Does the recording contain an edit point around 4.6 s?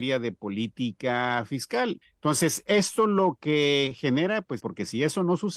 yes; 2 cuts; at 2.0 s, 4.6 s

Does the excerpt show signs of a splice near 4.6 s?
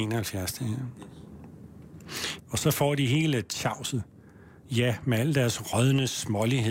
no; 1 cut; at 2.4 s

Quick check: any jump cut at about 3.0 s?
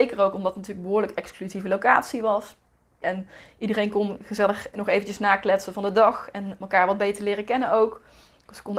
yes; 1 cut; at 3.0 s

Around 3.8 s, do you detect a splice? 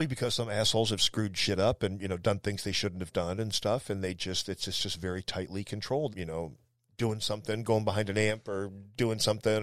no; 1 cut; at 6.1 s

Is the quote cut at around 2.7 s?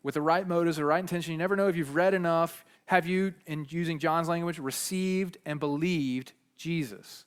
yes; 1 cut; at 2.7 s

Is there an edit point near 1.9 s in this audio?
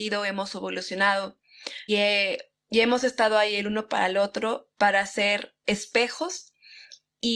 yes; 2 cuts; at 1.9 s, 4.7 s

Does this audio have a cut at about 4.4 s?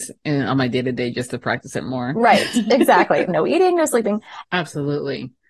yes; 2 cuts; at 3.3 s, 4.4 s

